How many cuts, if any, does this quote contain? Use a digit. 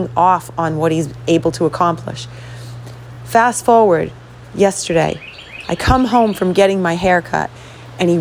0